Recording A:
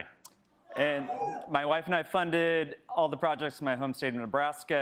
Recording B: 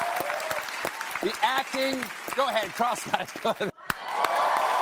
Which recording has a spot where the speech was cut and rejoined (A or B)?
B